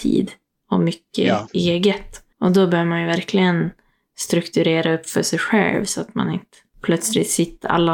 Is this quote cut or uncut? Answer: uncut